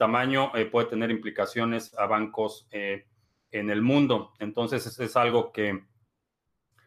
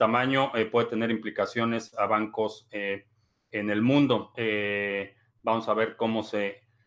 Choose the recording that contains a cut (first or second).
second